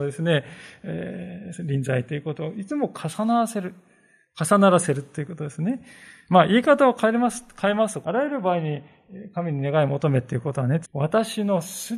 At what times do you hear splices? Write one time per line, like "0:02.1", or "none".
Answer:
0:08.0
0:10.8

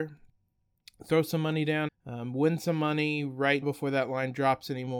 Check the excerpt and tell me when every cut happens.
0:01.9
0:03.6

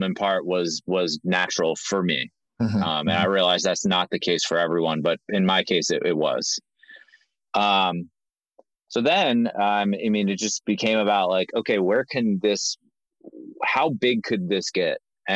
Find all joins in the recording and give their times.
none

